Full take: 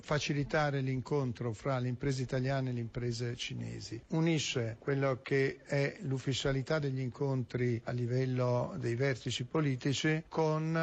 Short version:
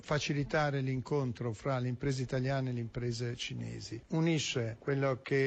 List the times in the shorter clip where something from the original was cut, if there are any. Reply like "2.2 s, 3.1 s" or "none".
none